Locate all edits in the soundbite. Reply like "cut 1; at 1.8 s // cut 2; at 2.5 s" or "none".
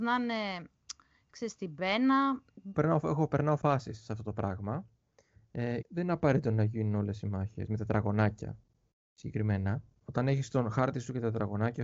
cut 1; at 2.7 s // cut 2; at 5.8 s